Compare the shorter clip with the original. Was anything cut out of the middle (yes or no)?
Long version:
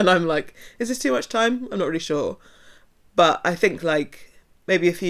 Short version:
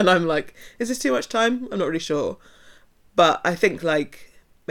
no